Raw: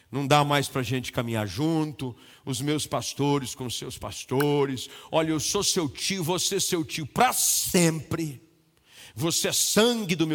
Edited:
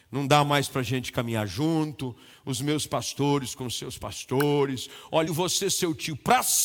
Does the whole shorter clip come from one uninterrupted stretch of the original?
no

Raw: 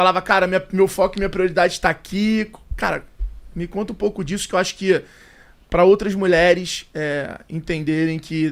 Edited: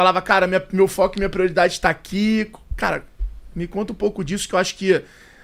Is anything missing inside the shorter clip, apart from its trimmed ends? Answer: no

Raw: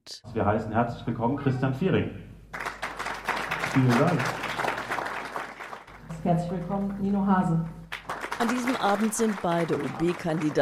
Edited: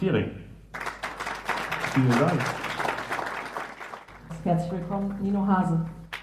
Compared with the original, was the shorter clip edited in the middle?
no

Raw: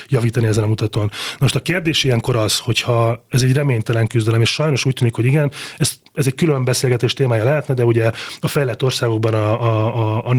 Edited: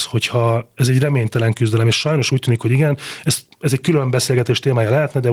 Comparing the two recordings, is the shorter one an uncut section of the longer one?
yes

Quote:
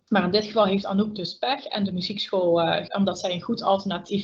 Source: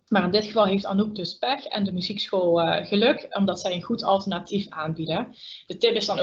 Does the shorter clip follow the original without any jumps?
no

